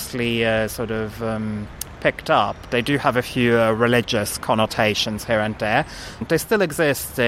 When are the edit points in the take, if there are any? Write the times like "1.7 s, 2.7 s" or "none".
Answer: 6.2 s